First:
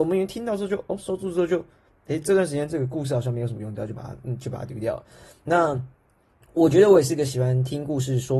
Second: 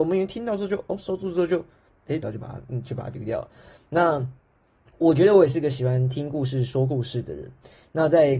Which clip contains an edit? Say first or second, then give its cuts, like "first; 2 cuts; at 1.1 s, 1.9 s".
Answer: second; 1 cut; at 2.2 s